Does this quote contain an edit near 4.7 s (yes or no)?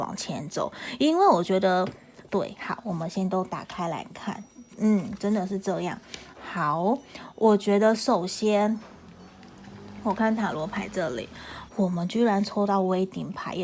no